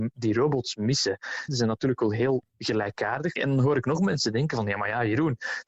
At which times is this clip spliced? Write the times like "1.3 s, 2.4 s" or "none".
1.5 s, 3.4 s